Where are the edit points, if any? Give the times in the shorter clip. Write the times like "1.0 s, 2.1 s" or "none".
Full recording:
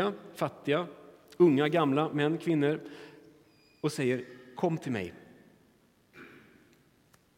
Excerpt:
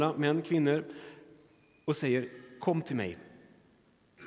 none

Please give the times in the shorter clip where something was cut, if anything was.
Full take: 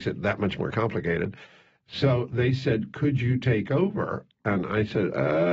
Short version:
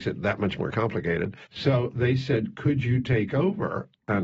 1.4 s

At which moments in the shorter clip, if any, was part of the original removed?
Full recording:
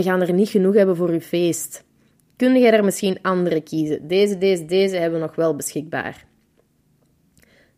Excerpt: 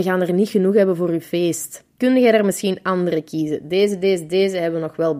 1.9 s

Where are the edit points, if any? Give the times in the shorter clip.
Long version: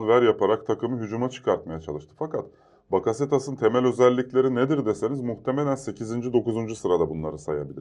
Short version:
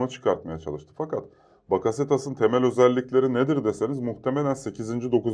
none

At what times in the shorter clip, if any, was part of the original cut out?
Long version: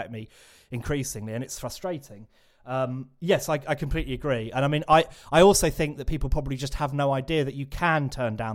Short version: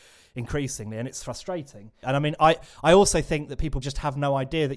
2.0 s, 3.8 s

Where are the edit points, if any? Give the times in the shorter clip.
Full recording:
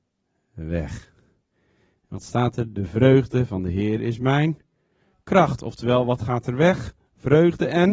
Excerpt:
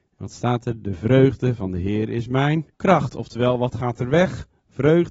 2.7 s

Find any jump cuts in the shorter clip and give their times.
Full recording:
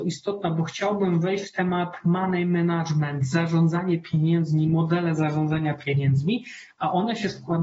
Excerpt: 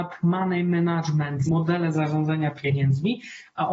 1.5 s

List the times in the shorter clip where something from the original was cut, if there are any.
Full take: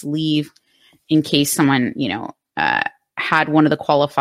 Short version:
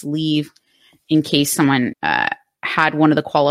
1.9 s

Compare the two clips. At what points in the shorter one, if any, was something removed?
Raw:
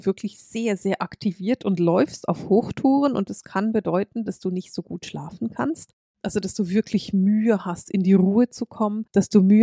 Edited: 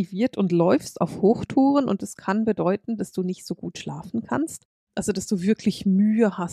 none

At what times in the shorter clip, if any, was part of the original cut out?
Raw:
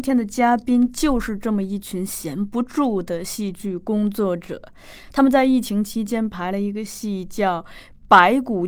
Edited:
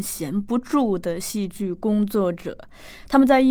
none

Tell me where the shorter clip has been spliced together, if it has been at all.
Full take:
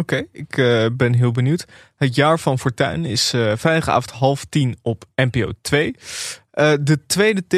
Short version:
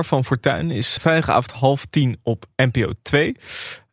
1.0 s

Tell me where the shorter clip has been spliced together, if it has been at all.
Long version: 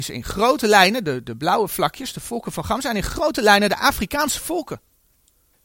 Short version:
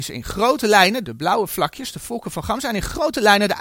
1.0 s

